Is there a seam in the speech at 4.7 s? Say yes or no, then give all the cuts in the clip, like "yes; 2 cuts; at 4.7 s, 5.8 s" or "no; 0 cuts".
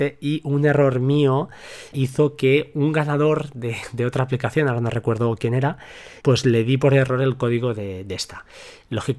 no; 2 cuts; at 1.9 s, 6.2 s